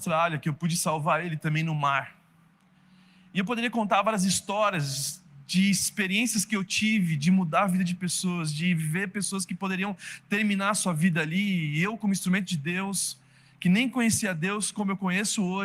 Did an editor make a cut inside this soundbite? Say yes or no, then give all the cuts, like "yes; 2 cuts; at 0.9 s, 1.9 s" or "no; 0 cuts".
no; 0 cuts